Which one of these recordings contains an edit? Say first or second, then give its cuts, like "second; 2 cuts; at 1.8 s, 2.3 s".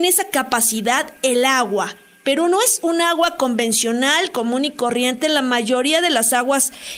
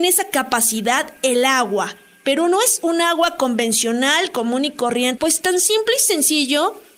second; 1 cut; at 5.2 s